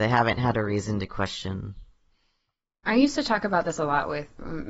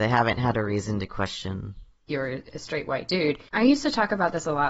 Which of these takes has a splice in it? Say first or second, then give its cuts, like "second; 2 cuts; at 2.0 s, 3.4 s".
second; 2 cuts; at 2.1 s, 3.5 s